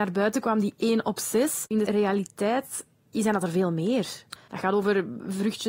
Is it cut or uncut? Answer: cut